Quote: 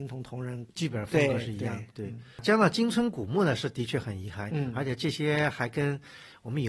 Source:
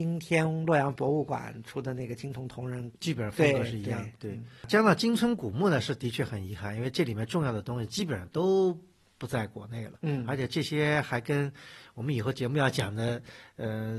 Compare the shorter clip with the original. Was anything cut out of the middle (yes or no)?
yes